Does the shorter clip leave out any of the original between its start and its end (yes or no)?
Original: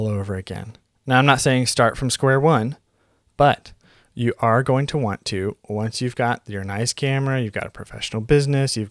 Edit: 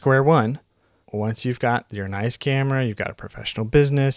yes